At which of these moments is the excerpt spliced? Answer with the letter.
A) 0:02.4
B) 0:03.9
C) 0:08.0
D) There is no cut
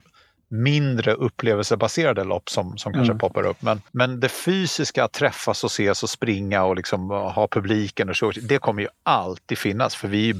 B